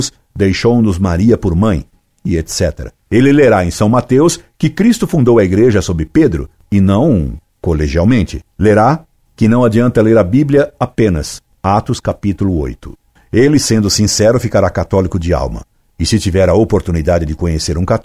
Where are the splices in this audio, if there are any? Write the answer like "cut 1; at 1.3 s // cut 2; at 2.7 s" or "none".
none